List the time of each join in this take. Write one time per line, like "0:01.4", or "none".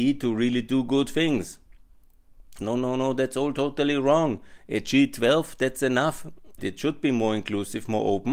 0:02.6
0:06.6